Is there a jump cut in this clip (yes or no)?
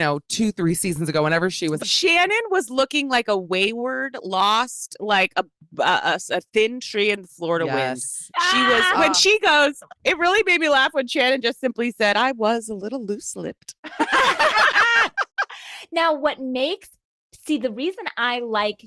yes